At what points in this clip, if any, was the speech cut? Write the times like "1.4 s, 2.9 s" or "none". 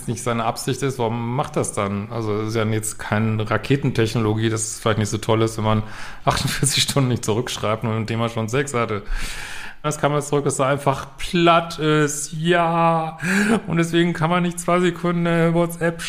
9.8 s